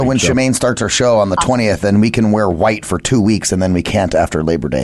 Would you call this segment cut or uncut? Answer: uncut